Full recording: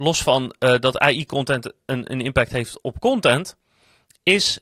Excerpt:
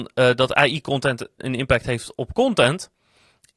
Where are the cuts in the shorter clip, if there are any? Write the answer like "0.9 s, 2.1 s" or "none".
1.4 s